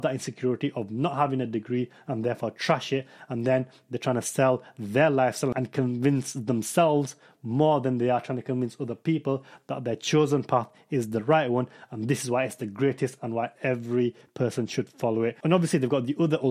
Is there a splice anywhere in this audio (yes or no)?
no